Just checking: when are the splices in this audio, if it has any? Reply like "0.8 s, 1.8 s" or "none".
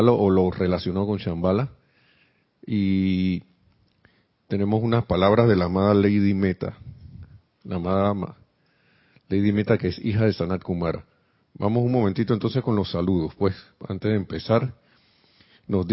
none